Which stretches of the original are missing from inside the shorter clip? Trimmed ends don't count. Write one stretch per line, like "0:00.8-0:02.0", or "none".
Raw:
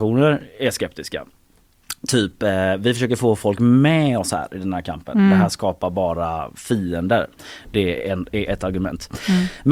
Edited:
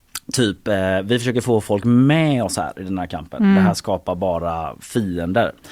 none